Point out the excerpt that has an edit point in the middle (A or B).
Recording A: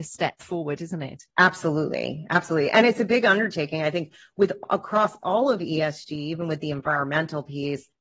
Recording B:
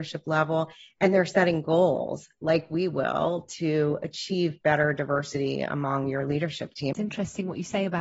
B